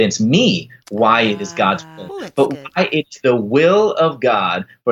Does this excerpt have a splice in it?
yes; 1 cut; at 2.1 s

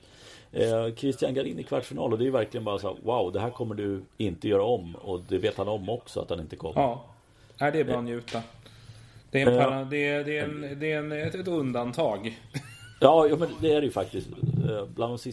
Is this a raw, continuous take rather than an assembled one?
yes; 0 cuts

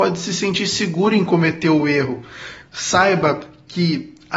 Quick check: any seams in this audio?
yes; 1 cut; at 2.6 s

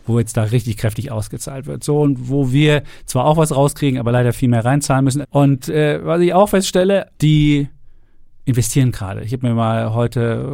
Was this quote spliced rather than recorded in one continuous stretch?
yes; 2 cuts; at 5.2 s, 7.1 s

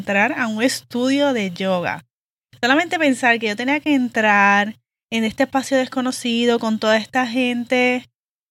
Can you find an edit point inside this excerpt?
no; 0 cuts

